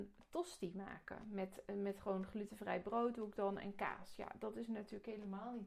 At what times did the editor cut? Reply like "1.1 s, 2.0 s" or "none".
none

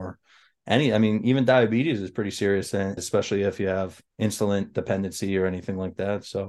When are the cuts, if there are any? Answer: 3.0 s, 4.1 s

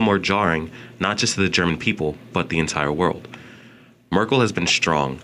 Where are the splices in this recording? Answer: none

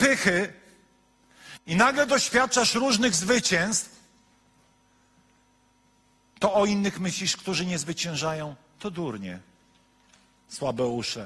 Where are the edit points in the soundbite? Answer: none

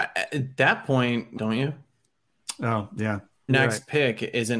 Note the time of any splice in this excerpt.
1.4 s, 3.5 s

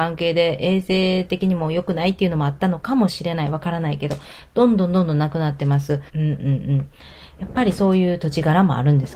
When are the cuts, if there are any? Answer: 6.1 s

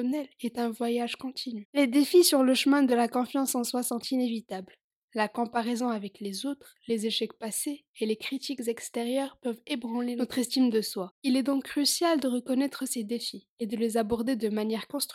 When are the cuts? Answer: none

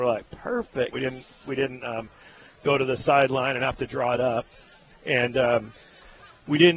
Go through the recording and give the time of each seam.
0.9 s

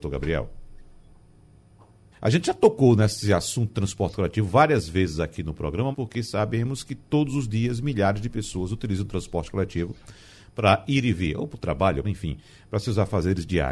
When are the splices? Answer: 2.1 s, 5.9 s, 12.0 s

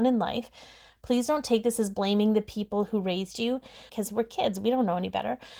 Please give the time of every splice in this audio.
3.9 s

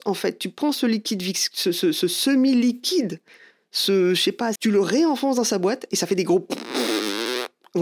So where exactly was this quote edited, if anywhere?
4.6 s

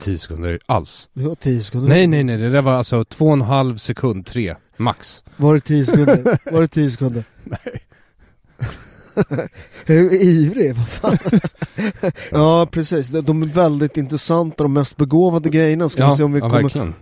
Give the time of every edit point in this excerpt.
12.3 s

